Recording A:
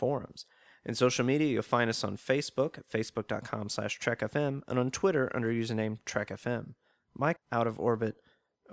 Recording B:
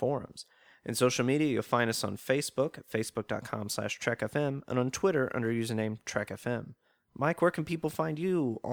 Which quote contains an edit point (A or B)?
A